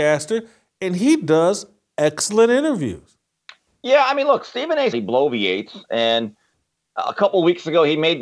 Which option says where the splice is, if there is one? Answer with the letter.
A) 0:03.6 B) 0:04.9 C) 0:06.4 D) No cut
B